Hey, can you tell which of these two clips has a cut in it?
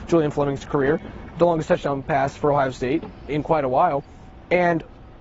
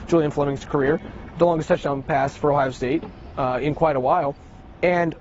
first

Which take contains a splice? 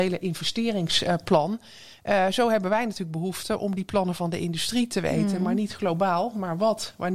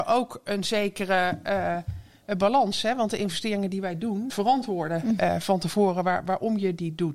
second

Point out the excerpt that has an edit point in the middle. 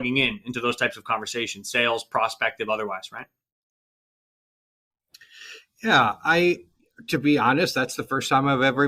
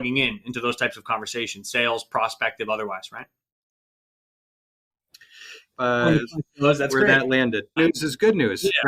second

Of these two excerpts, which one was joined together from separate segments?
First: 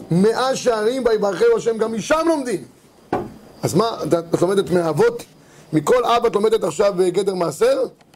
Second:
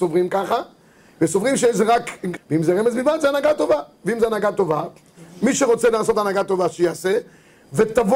second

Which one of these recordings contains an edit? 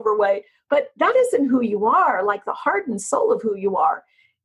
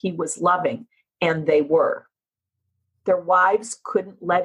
second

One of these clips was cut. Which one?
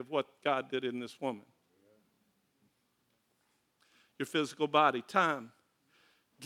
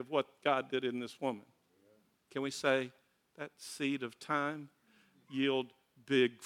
second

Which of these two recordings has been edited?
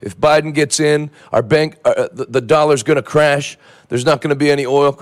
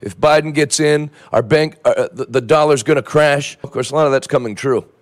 second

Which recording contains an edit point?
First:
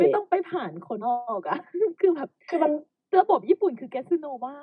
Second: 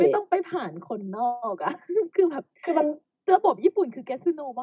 first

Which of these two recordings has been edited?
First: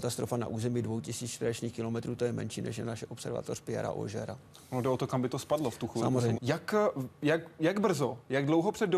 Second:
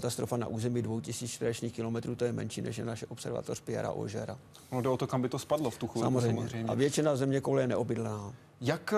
first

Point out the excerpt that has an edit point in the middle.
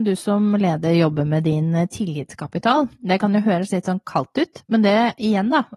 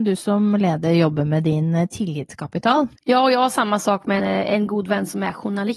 second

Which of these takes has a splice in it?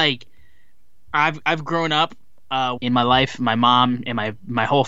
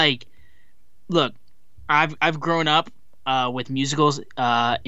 first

